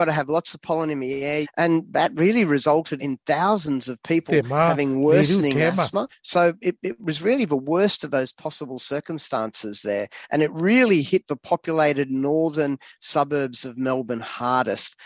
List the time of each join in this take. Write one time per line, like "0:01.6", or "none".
0:01.4
0:03.0
0:06.1